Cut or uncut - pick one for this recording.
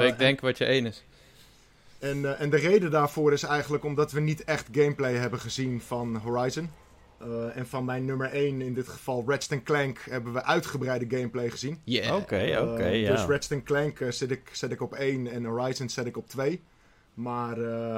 uncut